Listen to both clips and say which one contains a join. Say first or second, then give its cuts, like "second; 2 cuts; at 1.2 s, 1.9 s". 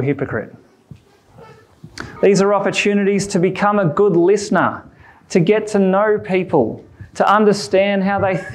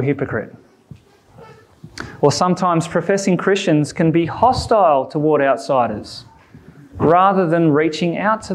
first; 1 cut; at 2.2 s